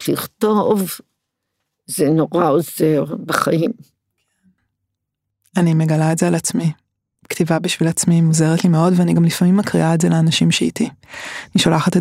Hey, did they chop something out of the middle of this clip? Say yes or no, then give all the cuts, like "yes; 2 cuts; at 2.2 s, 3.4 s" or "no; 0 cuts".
no; 0 cuts